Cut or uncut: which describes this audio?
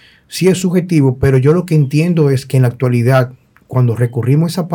uncut